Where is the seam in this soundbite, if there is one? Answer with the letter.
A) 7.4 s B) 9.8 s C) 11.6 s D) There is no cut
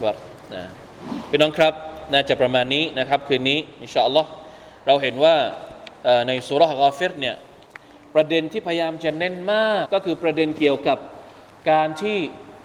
B